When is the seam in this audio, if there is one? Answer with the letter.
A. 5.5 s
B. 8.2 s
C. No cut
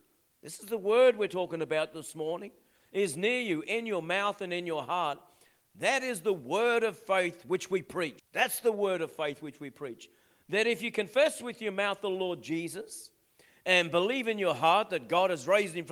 B